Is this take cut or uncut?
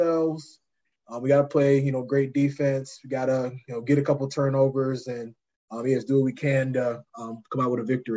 uncut